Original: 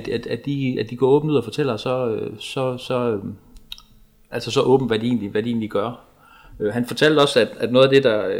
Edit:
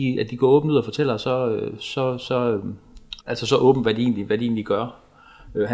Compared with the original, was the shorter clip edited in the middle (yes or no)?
yes